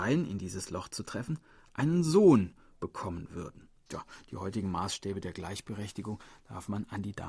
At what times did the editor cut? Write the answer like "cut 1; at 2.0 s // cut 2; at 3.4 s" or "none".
cut 1; at 3.9 s